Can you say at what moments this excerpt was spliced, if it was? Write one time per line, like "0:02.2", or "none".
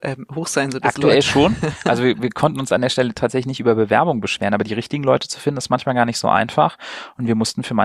none